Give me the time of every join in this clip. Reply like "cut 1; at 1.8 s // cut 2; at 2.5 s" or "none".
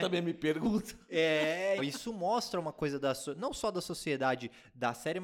cut 1; at 1.8 s